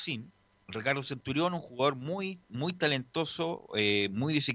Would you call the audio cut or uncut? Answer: uncut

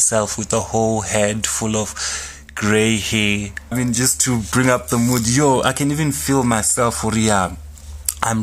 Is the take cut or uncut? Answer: cut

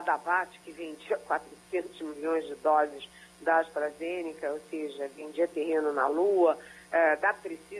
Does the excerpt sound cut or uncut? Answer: uncut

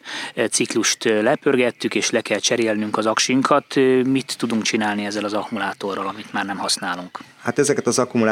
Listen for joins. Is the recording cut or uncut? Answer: uncut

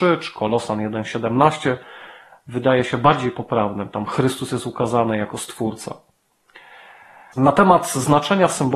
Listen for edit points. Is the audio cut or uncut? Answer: cut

